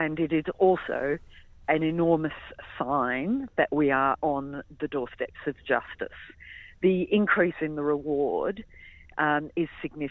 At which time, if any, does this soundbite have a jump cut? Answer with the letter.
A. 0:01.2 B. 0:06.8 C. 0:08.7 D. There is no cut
D